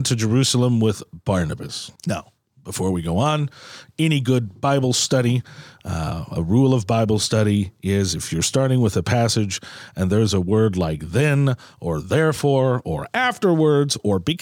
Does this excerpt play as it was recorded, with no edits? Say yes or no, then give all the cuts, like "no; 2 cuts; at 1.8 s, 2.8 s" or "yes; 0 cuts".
no; 1 cut; at 2.0 s